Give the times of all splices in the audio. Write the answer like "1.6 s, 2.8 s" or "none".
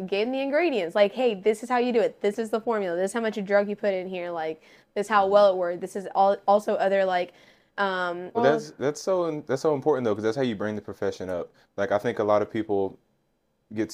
8.3 s